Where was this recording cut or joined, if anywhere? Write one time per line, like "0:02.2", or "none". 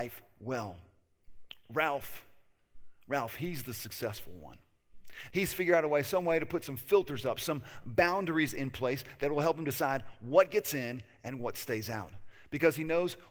0:05.3